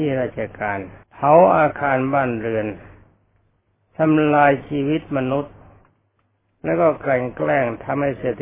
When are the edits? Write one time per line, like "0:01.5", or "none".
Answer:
0:01.0